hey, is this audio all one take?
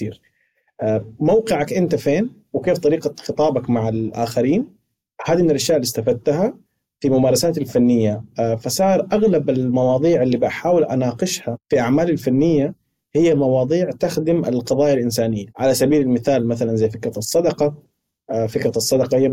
no; 2 cuts; at 11.6 s, 15.5 s

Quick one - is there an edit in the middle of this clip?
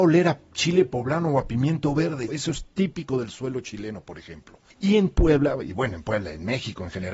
yes; 2 cuts; at 2.3 s, 4.7 s

